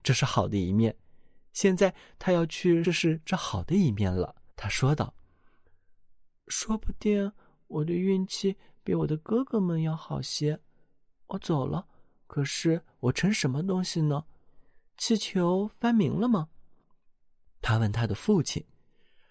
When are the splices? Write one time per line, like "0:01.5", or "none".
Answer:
0:02.8
0:04.5